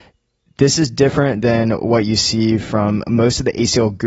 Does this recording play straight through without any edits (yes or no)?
yes